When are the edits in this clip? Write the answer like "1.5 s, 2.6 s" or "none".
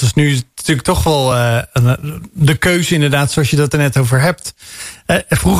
none